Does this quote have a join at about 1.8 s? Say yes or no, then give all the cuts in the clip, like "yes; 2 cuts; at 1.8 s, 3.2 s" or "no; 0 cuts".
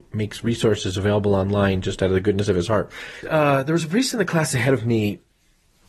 no; 1 cut; at 3.2 s